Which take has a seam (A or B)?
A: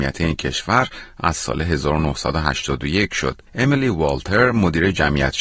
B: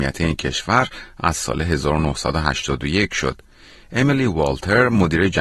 A